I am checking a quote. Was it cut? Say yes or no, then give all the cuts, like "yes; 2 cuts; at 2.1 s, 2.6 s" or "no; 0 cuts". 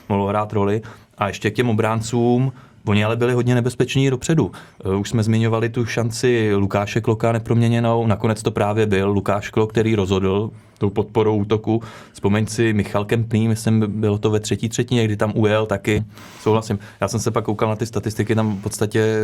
yes; 1 cut; at 16.0 s